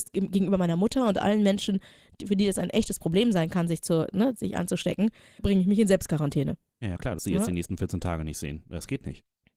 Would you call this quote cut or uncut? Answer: cut